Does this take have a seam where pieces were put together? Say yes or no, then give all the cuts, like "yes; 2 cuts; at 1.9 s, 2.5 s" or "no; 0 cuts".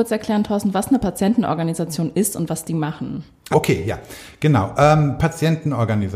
yes; 1 cut; at 3.5 s